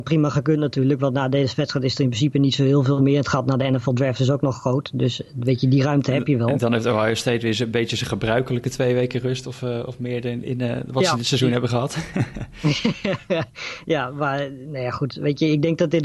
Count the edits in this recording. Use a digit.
0